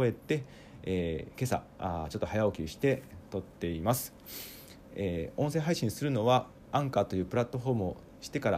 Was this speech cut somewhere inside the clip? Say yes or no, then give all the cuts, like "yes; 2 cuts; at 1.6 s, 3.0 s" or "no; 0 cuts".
yes; 1 cut; at 6.6 s